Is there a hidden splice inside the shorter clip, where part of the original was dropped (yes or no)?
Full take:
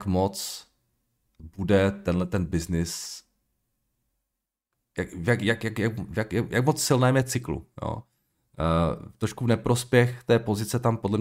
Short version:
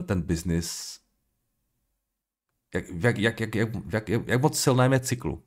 no